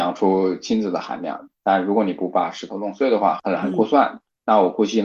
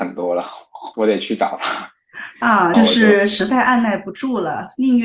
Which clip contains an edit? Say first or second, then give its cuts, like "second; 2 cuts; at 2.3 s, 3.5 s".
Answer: second; 2 cuts; at 0.9 s, 2.7 s